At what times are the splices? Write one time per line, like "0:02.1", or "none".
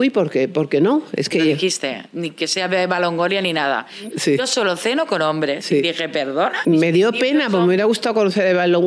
0:04.1
0:06.6